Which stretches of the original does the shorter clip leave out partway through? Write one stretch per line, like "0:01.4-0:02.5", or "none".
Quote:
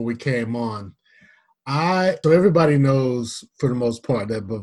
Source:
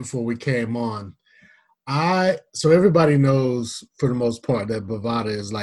0:02.4-0:02.6